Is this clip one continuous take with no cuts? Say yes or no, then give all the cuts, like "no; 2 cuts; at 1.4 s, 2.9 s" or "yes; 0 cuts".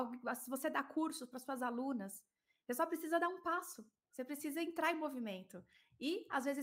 yes; 0 cuts